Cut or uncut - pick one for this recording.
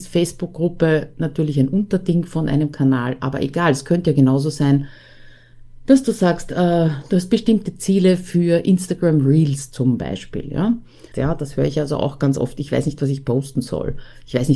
cut